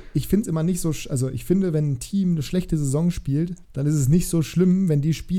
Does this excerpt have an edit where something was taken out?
yes; 1 cut; at 3.6 s

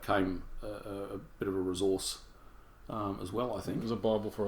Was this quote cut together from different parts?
no; 0 cuts

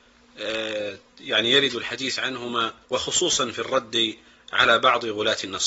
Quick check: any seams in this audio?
yes; 1 cut; at 2.8 s

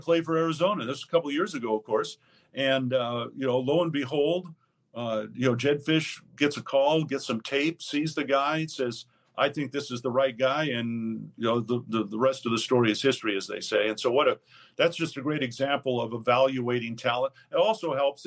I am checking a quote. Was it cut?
no; 0 cuts

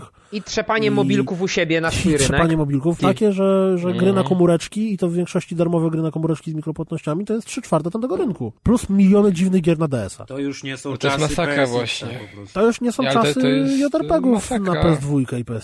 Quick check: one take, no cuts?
no; 2 cuts; at 3.0 s, 8.6 s

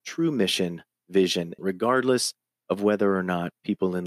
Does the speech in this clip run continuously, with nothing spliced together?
no; 1 cut; at 1.6 s

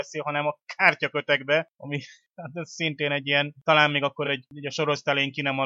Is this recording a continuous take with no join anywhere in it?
yes; 0 cuts

